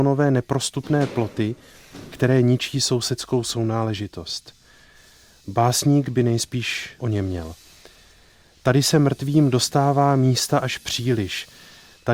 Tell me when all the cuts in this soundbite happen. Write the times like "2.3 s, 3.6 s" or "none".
none